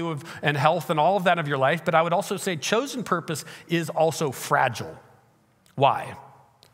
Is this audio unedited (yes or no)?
yes